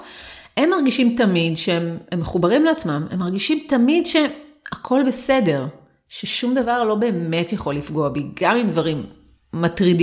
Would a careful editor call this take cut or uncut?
uncut